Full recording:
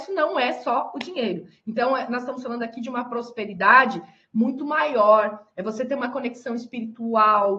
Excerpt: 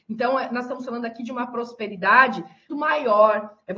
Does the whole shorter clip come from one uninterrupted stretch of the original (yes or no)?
no